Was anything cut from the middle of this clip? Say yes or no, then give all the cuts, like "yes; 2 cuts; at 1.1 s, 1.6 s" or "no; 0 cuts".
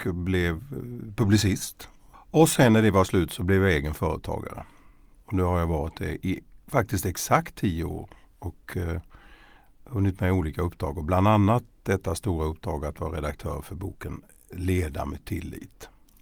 yes; 1 cut; at 2.1 s